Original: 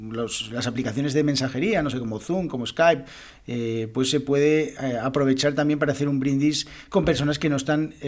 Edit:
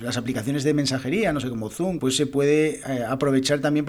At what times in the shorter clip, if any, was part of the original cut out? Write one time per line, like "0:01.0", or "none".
0:02.0